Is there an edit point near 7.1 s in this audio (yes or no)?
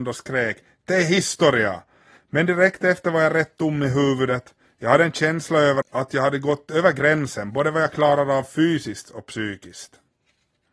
no